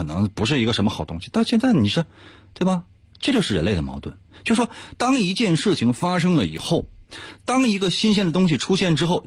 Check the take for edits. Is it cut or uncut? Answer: uncut